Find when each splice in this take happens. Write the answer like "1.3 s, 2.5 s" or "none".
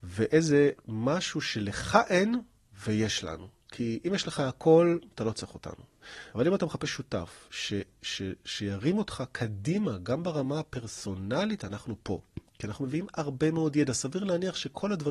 6.3 s